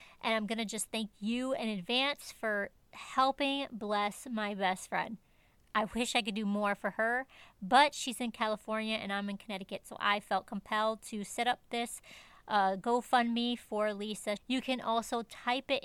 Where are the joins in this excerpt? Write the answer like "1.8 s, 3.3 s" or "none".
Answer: 14.4 s